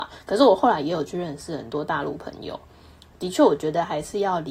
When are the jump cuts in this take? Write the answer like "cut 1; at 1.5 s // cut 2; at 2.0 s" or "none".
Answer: none